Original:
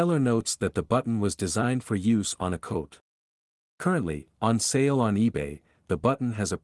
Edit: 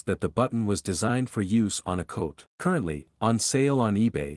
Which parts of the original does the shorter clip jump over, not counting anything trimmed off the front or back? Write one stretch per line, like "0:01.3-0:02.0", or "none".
0:03.0-0:03.7